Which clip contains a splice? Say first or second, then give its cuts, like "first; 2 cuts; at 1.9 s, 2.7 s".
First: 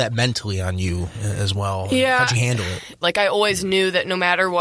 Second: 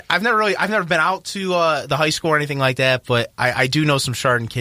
first; 1 cut; at 3.0 s